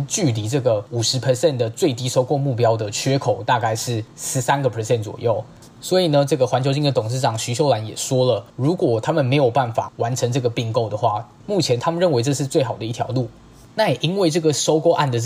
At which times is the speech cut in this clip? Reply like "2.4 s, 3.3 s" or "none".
11.4 s